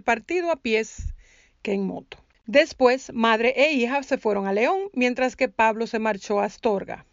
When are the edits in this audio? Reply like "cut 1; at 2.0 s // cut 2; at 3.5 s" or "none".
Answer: cut 1; at 2.4 s